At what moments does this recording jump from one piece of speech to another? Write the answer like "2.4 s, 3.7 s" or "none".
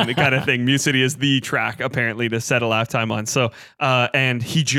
none

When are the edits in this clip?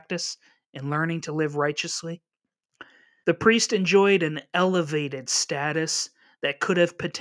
3.2 s

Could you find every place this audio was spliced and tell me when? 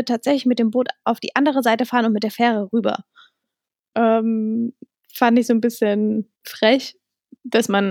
3.9 s, 6.4 s

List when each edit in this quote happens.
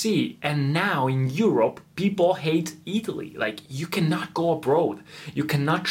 none

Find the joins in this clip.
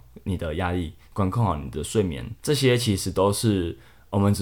2.4 s

